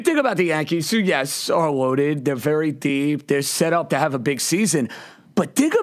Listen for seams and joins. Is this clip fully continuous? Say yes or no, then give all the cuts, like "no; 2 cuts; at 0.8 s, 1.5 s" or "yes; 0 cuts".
no; 1 cut; at 3.9 s